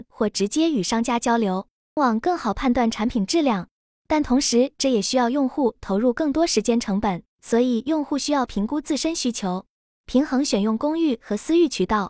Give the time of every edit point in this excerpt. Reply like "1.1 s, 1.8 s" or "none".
2.0 s, 7.3 s